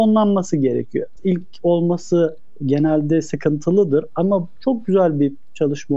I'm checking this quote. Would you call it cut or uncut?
cut